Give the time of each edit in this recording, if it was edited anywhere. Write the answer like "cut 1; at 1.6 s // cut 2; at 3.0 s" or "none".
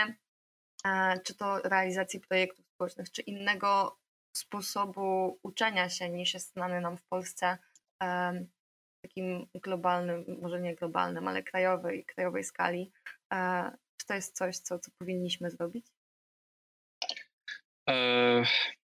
none